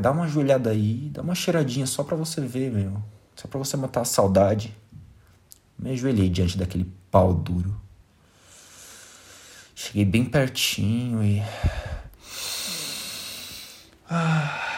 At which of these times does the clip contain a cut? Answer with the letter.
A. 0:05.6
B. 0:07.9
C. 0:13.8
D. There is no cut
D